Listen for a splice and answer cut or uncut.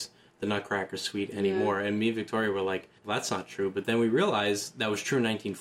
cut